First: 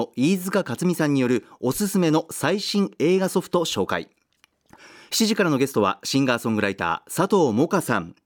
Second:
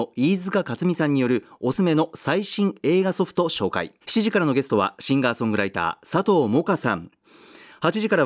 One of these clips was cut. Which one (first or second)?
second